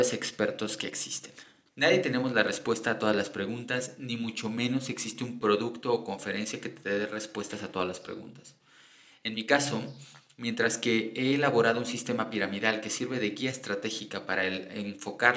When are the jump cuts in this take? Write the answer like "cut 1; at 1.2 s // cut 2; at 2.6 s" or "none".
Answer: cut 1; at 1.7 s